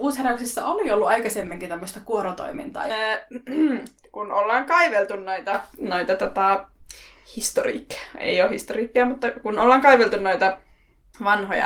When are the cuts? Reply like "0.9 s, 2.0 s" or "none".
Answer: 2.9 s